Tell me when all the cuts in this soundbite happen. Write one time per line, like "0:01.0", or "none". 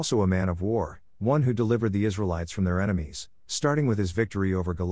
none